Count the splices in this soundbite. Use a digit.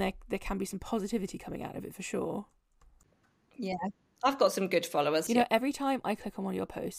1